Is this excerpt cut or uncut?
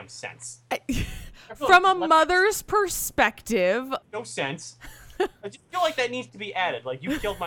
uncut